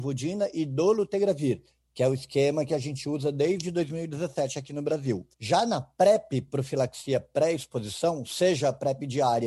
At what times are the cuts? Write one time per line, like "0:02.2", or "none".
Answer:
none

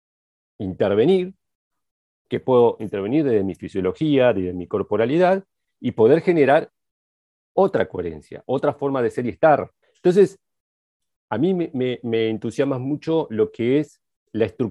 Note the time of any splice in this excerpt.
0:09.8

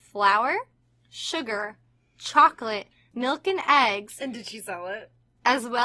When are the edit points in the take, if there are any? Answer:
none

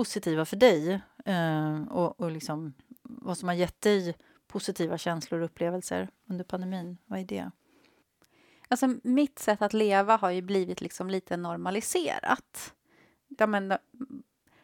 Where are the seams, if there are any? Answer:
0:13.4

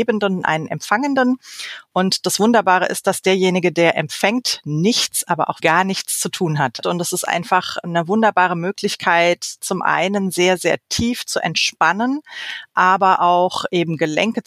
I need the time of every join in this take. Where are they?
0:05.6
0:06.8

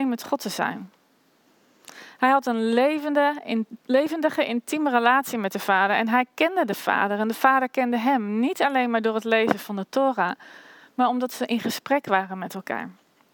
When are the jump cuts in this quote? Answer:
none

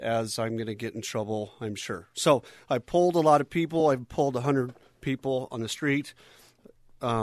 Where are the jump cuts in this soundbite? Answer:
none

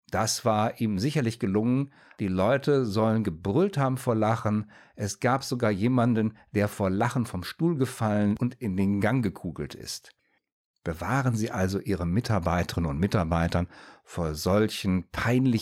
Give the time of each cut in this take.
none

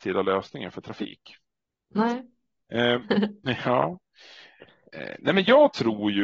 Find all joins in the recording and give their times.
0:03.0

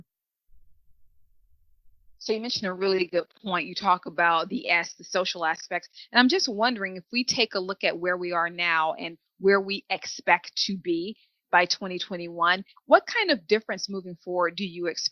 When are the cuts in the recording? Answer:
0:12.8

